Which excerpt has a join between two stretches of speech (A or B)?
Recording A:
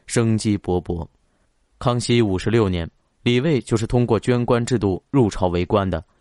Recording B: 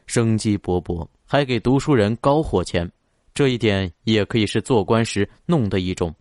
B